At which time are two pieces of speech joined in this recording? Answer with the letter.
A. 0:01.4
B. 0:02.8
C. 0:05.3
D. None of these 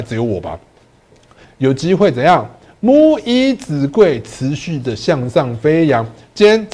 A